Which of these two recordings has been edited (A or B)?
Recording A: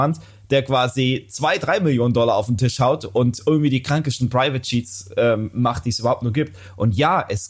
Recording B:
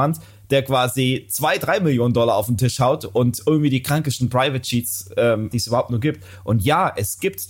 B